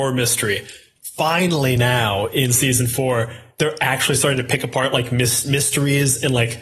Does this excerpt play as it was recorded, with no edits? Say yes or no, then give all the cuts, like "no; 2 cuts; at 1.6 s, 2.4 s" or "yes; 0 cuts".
yes; 0 cuts